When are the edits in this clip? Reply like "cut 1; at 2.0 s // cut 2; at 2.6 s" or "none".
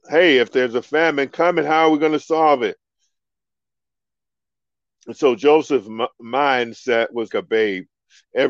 cut 1; at 7.3 s